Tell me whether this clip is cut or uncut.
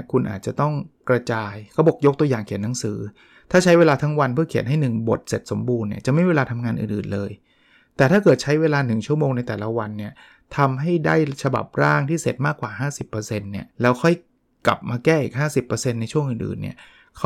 cut